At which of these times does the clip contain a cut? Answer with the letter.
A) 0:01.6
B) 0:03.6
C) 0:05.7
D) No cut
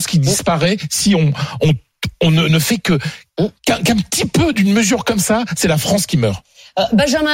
B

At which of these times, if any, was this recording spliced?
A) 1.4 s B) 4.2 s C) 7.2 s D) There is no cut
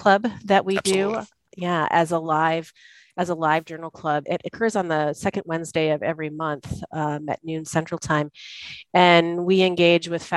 B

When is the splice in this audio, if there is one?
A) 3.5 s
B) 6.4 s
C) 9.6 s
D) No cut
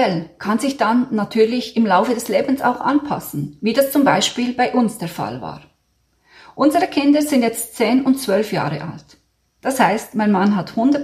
C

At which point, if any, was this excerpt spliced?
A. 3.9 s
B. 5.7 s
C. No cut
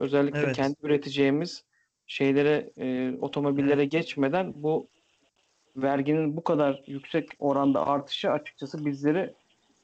C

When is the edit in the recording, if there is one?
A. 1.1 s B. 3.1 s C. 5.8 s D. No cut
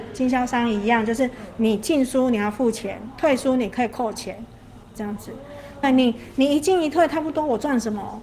C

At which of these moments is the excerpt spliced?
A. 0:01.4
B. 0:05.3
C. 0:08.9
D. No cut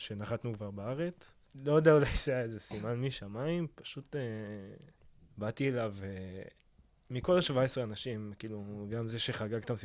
A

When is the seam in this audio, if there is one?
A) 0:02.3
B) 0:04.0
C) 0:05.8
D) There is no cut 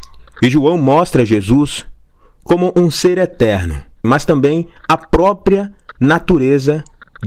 B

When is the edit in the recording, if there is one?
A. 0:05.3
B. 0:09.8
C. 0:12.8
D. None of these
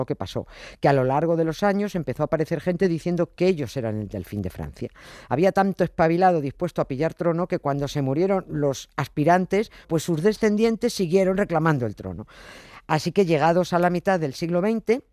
B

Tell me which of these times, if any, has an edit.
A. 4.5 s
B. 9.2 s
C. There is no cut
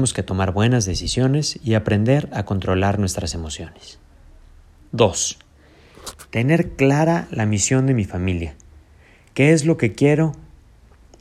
C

